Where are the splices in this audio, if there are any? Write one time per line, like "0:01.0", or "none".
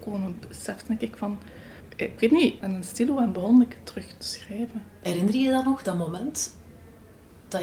0:02.6

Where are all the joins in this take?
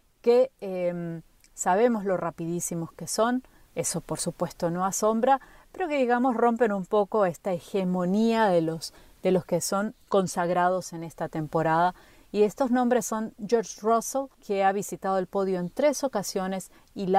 0:14.3

